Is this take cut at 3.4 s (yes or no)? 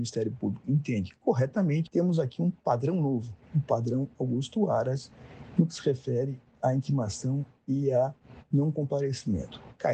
no